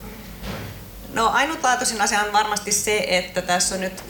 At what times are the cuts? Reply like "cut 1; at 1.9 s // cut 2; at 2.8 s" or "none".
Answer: none

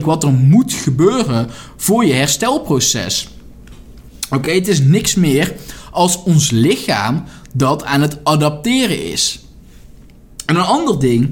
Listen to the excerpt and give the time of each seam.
none

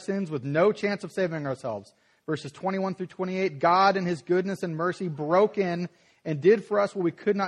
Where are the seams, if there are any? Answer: none

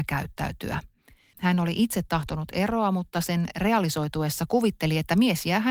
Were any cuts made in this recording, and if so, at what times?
cut 1; at 1.3 s

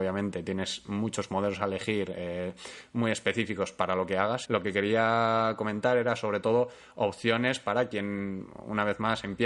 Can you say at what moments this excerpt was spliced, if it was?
cut 1; at 4.4 s

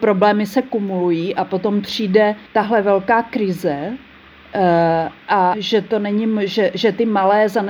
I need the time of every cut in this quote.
cut 1; at 2.5 s // cut 2; at 5.5 s

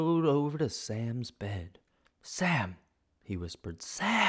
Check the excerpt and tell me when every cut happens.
cut 1; at 2.1 s

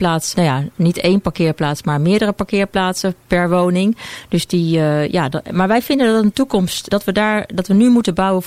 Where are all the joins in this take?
cut 1; at 6.9 s

